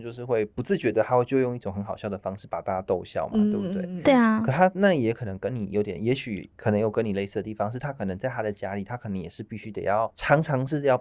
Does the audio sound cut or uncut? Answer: uncut